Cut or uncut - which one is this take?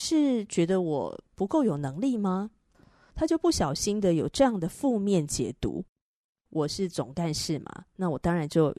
cut